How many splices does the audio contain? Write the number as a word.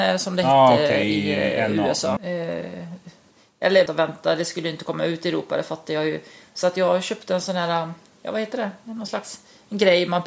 two